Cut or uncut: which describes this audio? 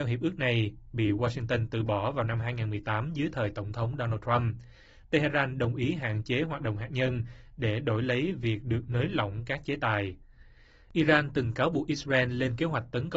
uncut